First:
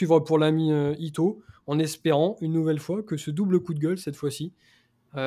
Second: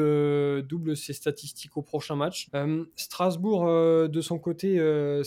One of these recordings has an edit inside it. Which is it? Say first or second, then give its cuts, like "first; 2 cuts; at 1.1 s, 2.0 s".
second; 1 cut; at 2.5 s